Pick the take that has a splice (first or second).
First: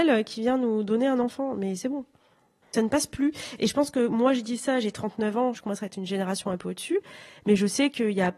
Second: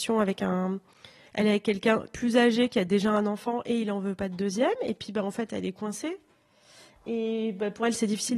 first